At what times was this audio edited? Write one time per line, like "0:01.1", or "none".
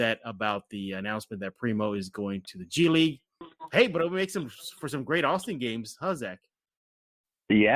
none